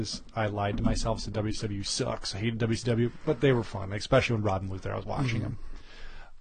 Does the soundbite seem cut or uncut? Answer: uncut